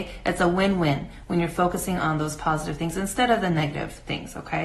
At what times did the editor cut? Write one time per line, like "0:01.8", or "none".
none